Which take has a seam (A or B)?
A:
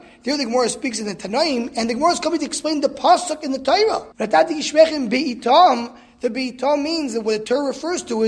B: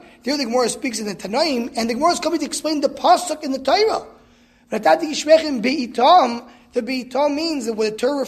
A